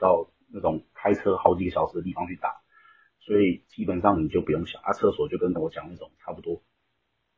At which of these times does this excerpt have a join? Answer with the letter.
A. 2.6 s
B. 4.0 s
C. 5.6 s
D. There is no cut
C